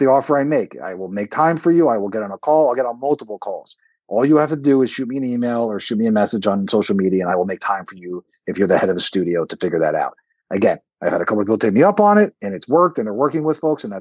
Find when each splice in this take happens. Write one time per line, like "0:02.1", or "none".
none